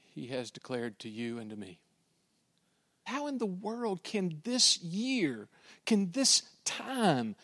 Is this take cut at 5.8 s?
no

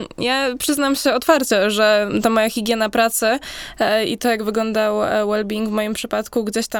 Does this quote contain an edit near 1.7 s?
no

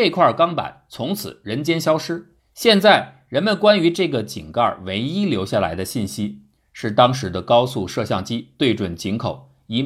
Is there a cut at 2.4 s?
yes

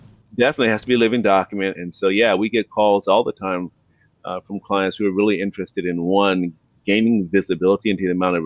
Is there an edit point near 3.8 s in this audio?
no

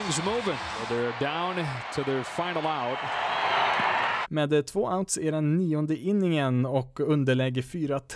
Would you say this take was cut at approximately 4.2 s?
yes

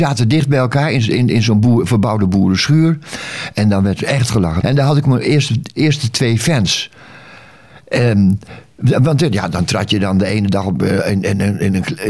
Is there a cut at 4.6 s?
yes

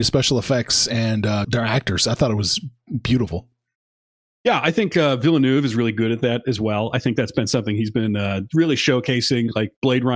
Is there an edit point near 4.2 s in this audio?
no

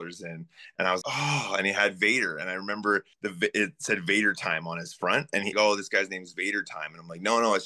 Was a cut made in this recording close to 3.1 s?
yes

